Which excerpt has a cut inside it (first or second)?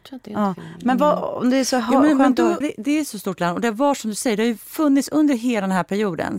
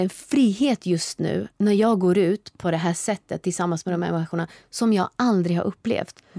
first